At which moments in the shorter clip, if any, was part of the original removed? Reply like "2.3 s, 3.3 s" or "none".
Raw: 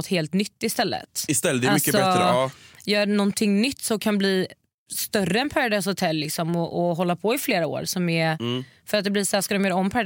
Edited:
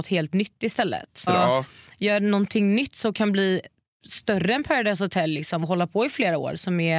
1.3 s, 5.6 s